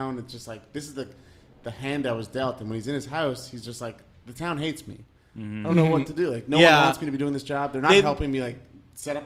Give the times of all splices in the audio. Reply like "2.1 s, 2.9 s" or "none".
none